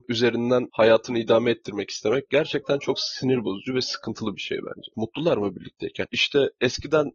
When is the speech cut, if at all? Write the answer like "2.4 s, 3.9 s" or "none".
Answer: 4.9 s, 6.1 s